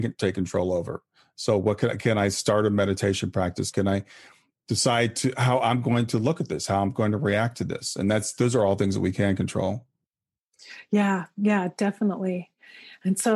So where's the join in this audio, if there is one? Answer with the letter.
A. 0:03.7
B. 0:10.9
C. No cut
A